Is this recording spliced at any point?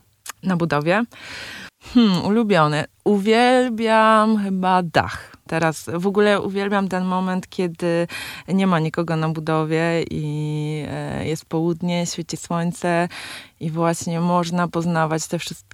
yes; 1 cut; at 5.5 s

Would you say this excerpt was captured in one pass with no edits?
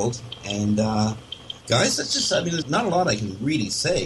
no; 2 cuts; at 1.6 s, 2.6 s

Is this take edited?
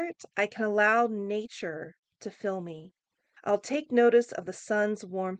yes; 1 cut; at 3.4 s

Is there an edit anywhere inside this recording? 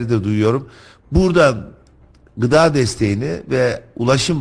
yes; 1 cut; at 1.0 s

